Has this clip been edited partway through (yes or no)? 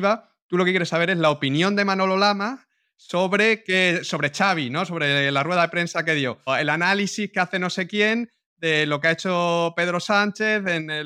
yes